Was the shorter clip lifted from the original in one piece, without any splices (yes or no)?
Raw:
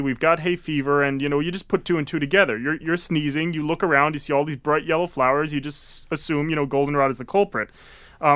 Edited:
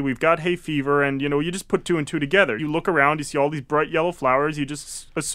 no